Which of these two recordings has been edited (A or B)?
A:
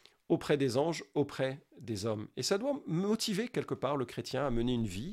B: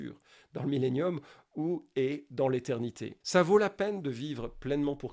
B